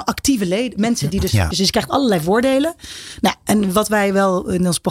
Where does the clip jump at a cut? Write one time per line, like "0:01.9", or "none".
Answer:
0:01.5